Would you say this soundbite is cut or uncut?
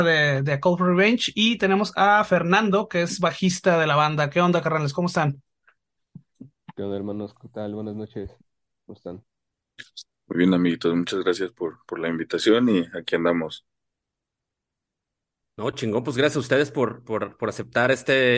uncut